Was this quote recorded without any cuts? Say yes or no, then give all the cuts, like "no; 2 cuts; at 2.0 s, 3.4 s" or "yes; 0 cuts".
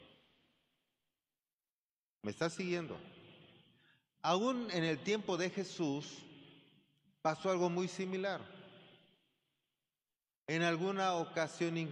yes; 0 cuts